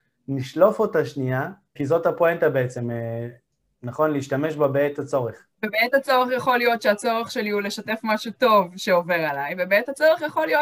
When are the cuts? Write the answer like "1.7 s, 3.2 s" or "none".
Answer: 1.8 s, 5.5 s